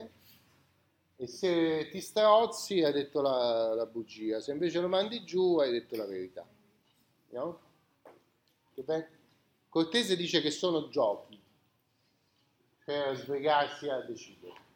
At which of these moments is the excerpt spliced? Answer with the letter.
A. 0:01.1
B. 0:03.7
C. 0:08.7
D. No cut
C